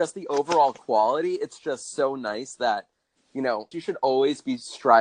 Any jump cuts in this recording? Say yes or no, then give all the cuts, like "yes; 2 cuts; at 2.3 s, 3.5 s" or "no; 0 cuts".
yes; 1 cut; at 3.7 s